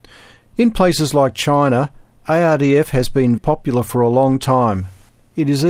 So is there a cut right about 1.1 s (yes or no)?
no